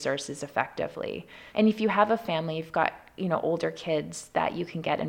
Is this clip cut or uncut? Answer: cut